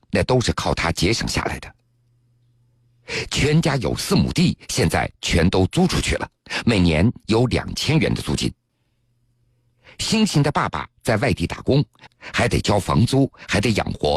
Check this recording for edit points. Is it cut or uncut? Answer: cut